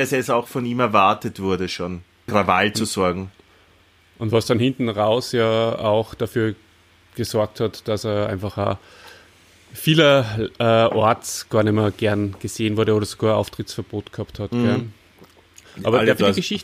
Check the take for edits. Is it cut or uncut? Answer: cut